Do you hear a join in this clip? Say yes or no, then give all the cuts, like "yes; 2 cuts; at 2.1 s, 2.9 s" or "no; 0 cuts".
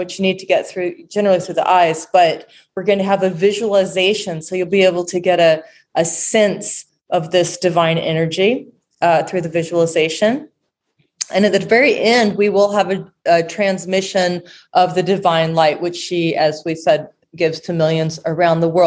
no; 0 cuts